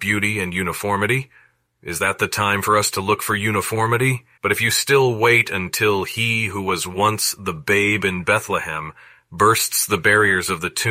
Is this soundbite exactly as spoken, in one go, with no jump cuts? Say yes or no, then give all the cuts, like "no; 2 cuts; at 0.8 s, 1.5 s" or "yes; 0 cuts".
no; 2 cuts; at 1.7 s, 4.4 s